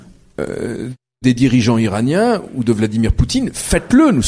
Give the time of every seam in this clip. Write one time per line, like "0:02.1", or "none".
none